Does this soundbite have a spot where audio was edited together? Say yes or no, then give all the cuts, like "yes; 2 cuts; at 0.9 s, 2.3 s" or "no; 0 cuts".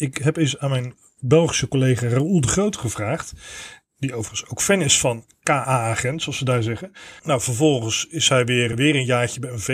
yes; 2 cuts; at 7.2 s, 8.7 s